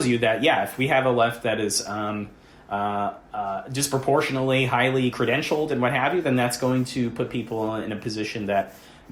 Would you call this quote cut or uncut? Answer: uncut